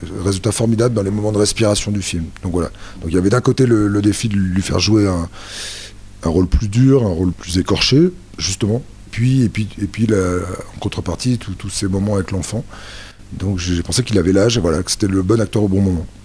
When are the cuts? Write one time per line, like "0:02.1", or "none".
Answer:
none